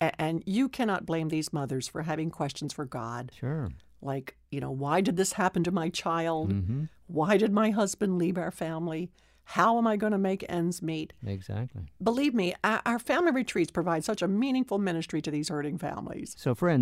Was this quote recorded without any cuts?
yes; 0 cuts

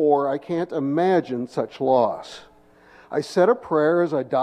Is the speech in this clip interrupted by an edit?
no; 0 cuts

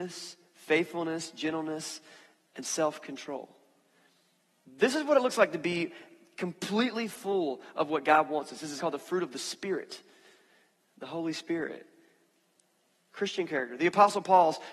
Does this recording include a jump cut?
yes; 2 cuts; at 8.8 s, 13.1 s

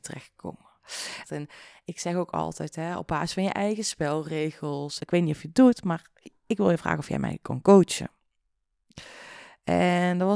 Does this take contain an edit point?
yes; 2 cuts; at 1.2 s, 5.0 s

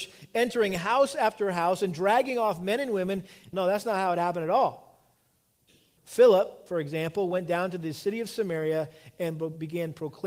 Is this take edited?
yes; 2 cuts; at 3.5 s, 6.0 s

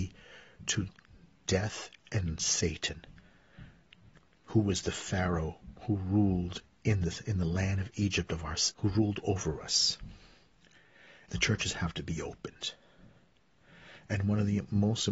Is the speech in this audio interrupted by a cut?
yes; 2 cuts; at 8.7 s, 11.3 s

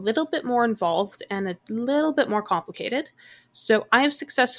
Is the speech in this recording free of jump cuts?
yes; 0 cuts

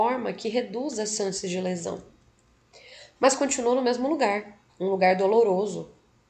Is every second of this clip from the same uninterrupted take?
no; 2 cuts; at 3.2 s, 4.7 s

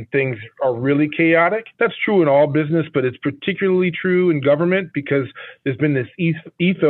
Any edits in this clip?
yes; 1 cut; at 1.7 s

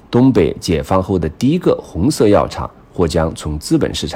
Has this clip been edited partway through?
no; 0 cuts

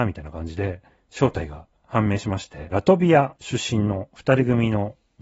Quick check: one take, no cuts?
no; 1 cut; at 2.7 s

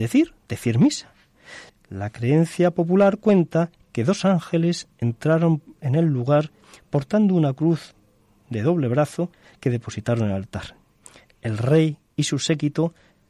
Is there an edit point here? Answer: yes; 1 cut; at 1.7 s

